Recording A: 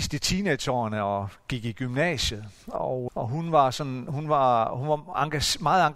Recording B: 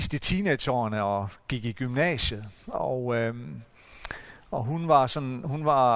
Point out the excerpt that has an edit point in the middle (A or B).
A